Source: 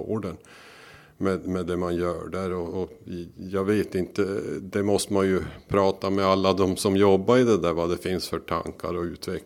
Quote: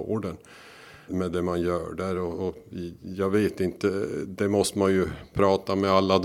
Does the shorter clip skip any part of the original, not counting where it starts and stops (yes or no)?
yes